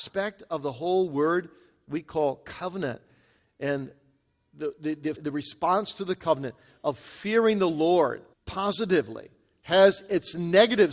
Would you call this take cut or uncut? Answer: cut